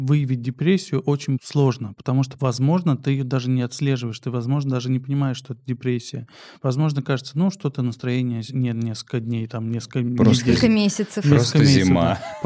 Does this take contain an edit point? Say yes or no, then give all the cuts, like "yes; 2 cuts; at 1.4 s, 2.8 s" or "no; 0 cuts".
no; 0 cuts